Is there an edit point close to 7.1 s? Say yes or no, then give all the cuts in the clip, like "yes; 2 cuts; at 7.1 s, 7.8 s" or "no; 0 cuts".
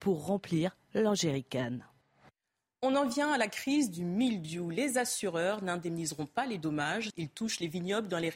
yes; 1 cut; at 7.1 s